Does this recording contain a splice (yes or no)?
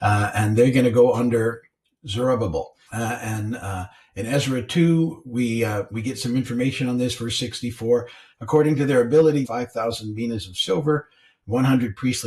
yes